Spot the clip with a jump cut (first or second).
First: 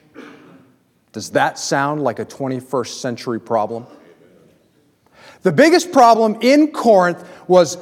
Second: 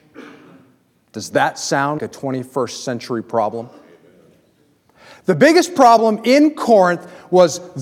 second